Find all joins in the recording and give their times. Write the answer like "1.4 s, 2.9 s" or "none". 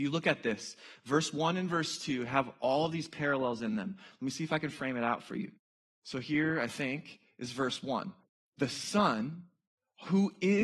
none